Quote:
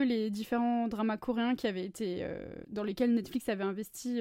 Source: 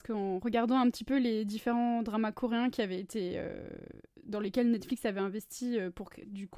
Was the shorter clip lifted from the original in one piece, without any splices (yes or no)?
no